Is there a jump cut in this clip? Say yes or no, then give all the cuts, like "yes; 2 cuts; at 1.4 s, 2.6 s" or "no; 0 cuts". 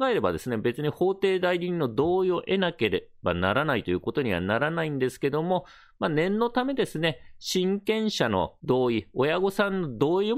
no; 0 cuts